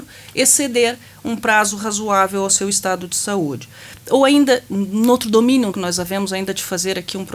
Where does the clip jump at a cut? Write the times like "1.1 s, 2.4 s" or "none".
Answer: 5.7 s